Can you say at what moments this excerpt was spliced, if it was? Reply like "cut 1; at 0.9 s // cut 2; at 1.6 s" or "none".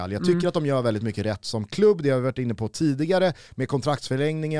none